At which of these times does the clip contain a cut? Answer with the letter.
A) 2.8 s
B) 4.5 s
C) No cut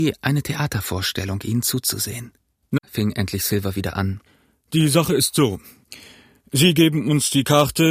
A